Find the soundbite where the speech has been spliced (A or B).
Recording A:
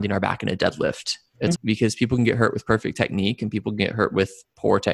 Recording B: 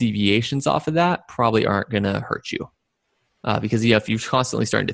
A